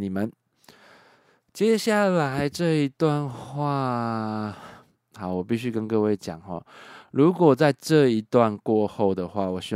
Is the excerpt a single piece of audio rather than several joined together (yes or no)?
yes